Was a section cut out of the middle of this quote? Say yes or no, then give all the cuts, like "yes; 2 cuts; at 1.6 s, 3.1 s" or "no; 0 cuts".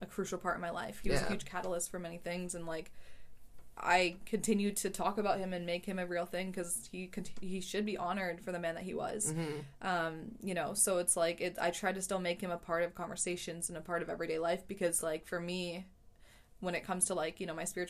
no; 0 cuts